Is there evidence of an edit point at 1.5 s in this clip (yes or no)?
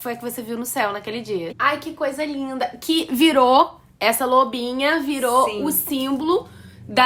yes